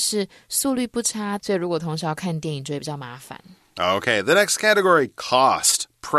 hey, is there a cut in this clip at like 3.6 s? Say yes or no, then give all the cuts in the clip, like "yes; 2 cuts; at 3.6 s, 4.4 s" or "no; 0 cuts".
no; 1 cut; at 1.4 s